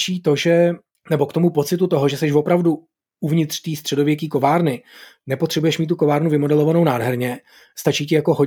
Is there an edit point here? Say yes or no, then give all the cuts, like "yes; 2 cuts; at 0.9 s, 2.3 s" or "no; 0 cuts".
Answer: no; 0 cuts